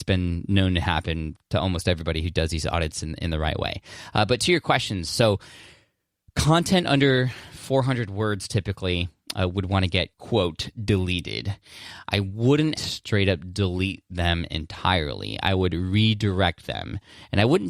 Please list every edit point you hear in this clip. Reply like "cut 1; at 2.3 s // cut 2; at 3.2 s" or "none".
cut 1; at 10.1 s // cut 2; at 12.8 s